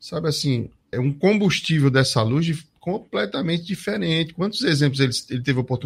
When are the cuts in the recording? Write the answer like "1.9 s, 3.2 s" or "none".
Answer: 0.9 s